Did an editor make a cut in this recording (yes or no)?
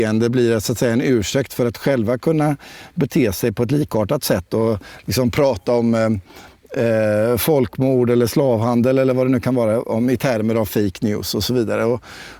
no